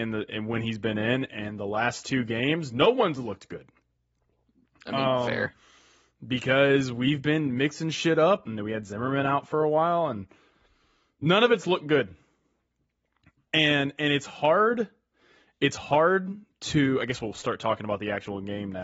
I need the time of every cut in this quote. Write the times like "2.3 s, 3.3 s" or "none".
8.4 s